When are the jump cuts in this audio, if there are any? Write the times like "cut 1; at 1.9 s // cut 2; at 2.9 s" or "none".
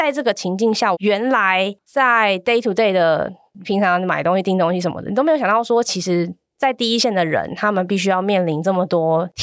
cut 1; at 0.9 s